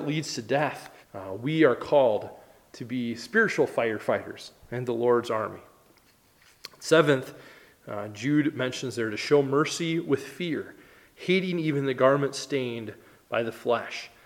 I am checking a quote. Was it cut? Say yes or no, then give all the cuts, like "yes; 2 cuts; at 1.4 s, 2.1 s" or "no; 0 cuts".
yes; 1 cut; at 1.0 s